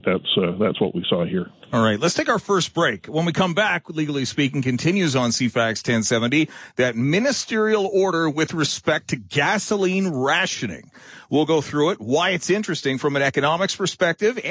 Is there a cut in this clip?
no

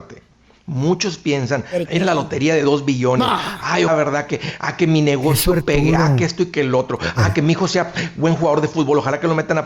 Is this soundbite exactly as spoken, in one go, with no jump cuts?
no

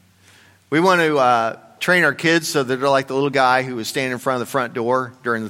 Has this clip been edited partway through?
no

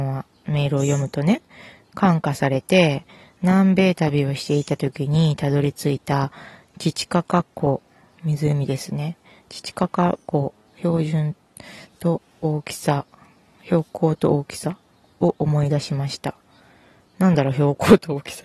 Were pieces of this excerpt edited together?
no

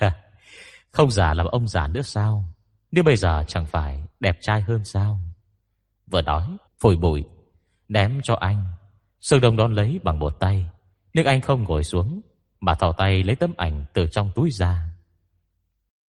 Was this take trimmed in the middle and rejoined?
yes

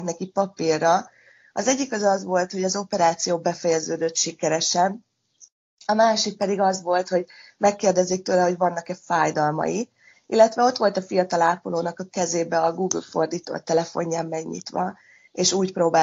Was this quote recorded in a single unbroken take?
yes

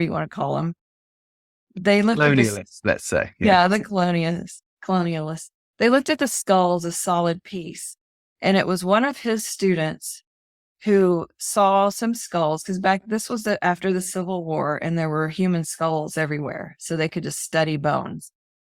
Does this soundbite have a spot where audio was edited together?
no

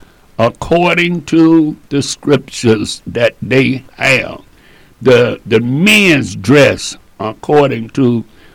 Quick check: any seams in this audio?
no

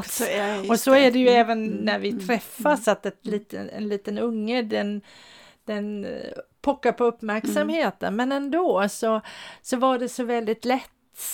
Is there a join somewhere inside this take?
no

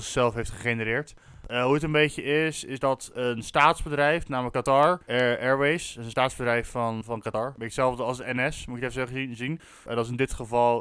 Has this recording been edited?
yes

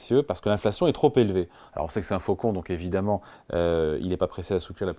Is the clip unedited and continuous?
yes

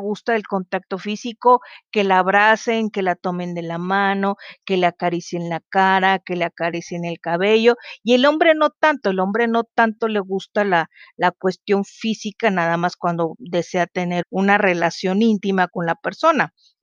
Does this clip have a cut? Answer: yes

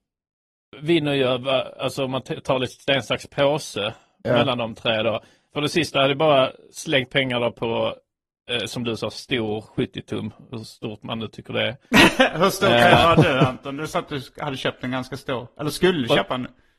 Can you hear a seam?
yes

